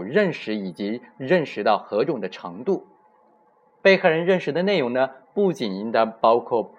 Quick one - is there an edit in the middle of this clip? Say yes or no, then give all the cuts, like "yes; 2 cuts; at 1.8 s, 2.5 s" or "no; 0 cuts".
no; 0 cuts